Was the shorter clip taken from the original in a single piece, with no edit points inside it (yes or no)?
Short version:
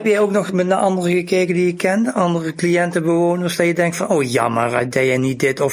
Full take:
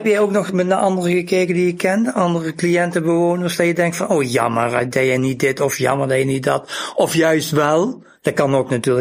yes